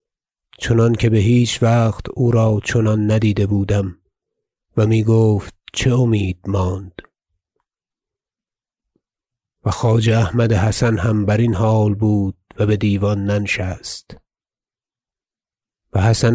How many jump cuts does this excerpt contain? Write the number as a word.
zero